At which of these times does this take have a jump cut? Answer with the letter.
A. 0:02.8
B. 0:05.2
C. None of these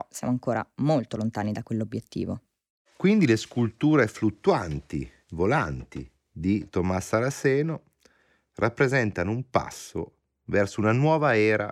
B